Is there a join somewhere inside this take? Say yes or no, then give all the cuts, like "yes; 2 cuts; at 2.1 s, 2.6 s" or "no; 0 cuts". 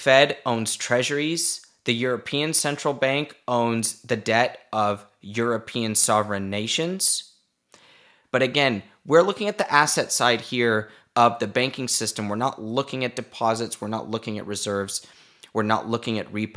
yes; 1 cut; at 8.2 s